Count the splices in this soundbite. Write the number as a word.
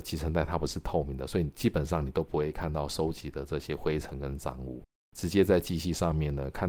one